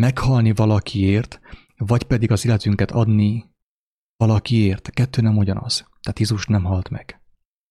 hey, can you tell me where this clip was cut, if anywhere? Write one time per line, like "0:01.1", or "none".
none